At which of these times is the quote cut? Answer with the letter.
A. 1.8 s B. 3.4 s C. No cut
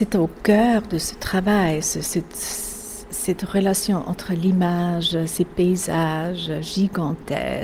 A